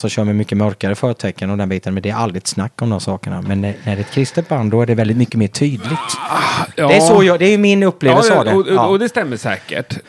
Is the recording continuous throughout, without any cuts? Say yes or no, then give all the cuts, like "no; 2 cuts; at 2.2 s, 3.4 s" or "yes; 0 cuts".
yes; 0 cuts